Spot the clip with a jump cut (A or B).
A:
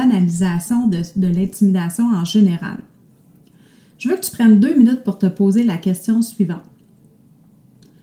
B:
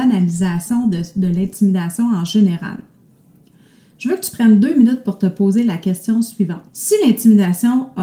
B